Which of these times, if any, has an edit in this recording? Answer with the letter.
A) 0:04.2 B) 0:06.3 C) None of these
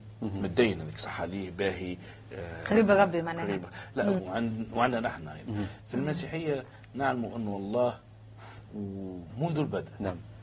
A